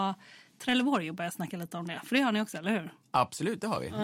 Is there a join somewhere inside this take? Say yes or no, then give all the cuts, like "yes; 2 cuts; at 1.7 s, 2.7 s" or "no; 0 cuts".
no; 0 cuts